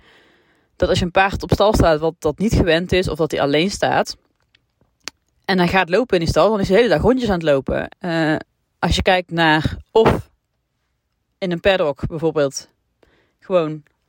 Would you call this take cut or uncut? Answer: cut